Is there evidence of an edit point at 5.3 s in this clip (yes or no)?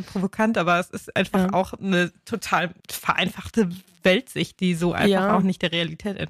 no